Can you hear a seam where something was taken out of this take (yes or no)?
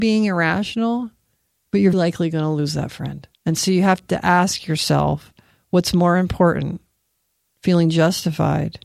yes